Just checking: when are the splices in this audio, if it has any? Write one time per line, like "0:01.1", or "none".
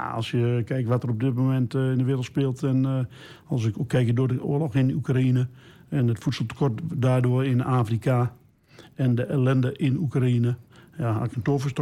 none